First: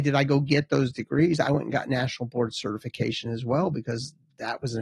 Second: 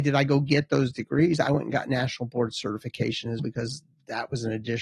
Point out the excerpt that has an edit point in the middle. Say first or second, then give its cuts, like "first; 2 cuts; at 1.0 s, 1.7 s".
second; 1 cut; at 3.4 s